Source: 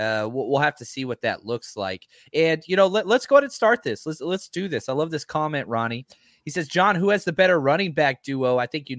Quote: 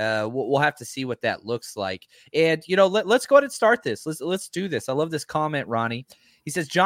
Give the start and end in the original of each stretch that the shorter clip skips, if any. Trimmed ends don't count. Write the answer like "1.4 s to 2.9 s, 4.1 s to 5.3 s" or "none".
none